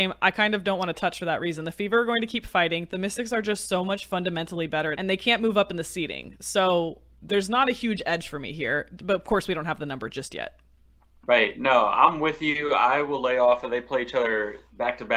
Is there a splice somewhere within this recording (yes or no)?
yes